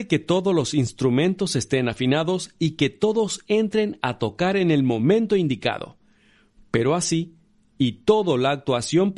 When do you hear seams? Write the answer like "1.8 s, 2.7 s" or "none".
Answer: none